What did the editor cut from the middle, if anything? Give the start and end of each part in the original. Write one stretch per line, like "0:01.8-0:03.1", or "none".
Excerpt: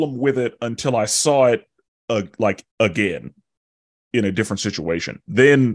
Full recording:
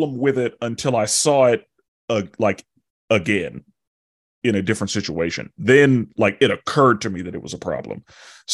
0:02.7-0:03.0